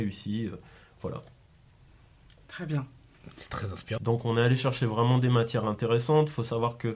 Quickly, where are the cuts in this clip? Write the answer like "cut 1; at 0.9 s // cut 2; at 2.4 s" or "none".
cut 1; at 4.0 s